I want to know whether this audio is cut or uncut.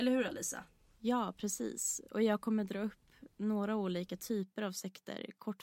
uncut